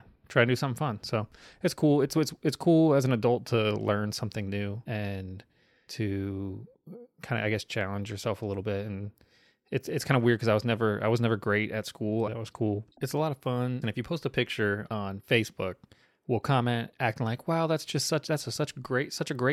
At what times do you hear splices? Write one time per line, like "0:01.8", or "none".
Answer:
0:12.3
0:13.8
0:14.9